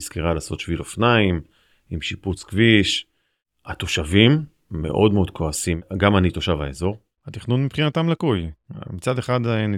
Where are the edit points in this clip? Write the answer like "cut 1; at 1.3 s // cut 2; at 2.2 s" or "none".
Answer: none